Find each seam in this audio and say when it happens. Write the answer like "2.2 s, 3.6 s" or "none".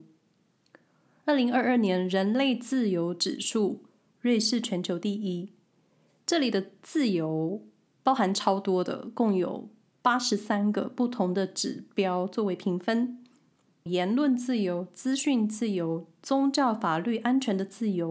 13.9 s

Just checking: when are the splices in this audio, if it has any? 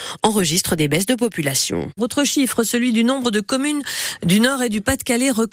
2.0 s

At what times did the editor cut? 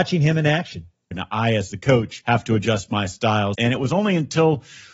1.1 s, 3.5 s

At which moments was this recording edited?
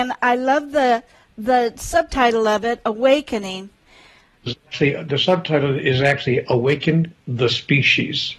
4.5 s

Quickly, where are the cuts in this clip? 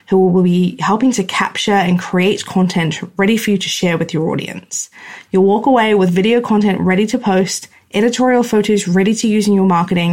5.2 s

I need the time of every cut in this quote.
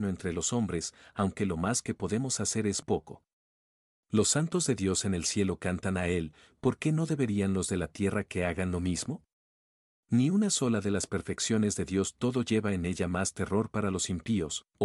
2.8 s

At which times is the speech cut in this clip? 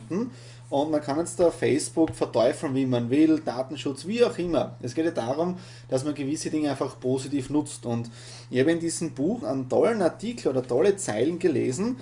9.4 s

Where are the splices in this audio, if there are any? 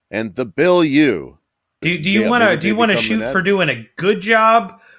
1.8 s

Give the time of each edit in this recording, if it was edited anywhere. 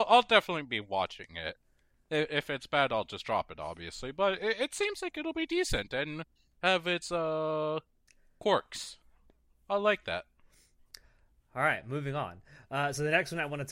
none

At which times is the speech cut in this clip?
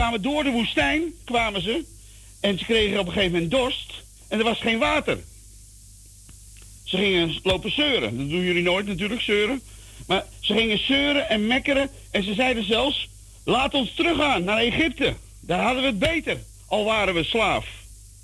6.8 s

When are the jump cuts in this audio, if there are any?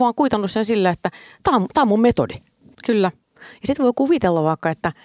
2.7 s

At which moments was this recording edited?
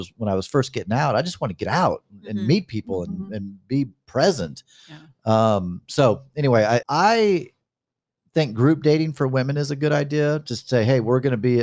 6.8 s

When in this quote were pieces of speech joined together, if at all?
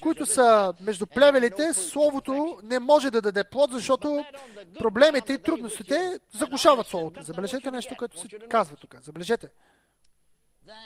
7.1 s

